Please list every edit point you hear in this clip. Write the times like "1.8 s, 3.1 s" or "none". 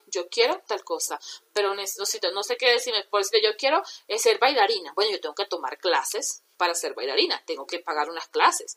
none

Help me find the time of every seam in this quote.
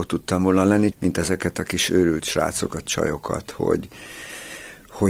0.9 s

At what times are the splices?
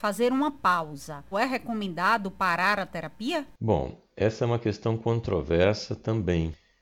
1.3 s

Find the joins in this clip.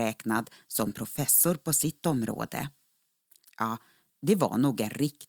3.4 s

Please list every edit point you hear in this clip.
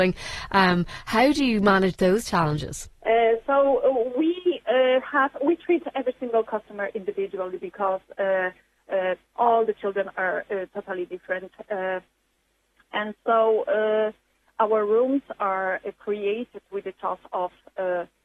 3.0 s

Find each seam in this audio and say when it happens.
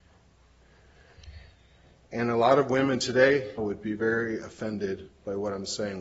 3.6 s

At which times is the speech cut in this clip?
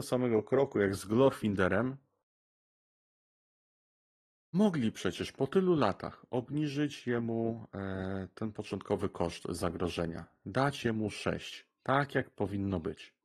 none

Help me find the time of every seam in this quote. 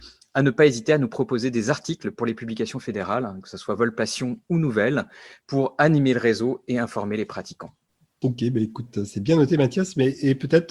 none

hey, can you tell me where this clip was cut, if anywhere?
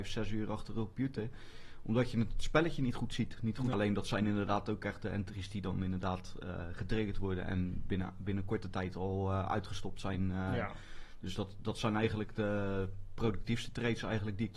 3.7 s

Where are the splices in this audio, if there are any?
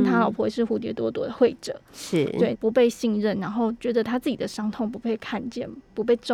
2.5 s

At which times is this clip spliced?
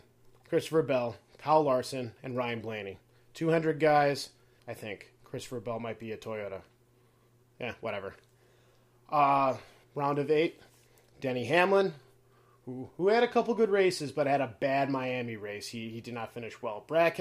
4.6 s, 9.8 s

